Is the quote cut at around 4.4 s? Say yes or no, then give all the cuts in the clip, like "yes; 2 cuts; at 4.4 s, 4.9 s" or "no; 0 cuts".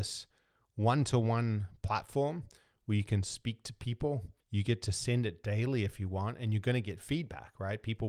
yes; 1 cut; at 4.4 s